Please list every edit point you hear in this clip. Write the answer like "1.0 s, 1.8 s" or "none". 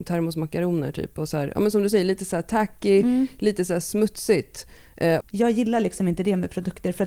5.2 s